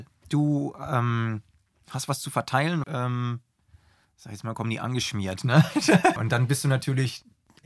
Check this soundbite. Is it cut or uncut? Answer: cut